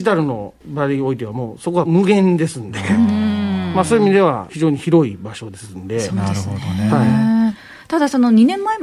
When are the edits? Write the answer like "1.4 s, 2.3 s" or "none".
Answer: none